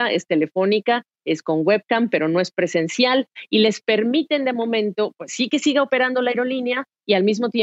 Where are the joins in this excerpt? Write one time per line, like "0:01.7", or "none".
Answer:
none